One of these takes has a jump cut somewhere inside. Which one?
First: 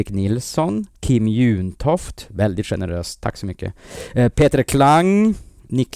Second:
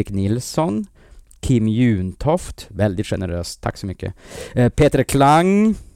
first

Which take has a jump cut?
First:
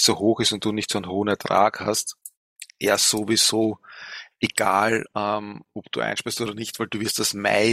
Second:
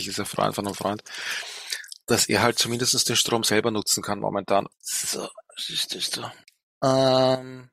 second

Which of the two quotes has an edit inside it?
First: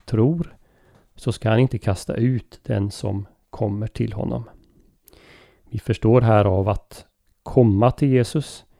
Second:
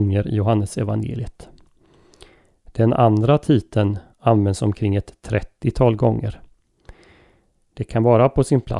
second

